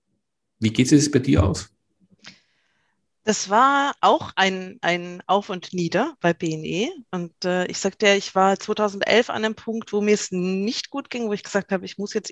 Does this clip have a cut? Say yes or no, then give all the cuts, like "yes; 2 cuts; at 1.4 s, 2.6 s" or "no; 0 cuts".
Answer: no; 0 cuts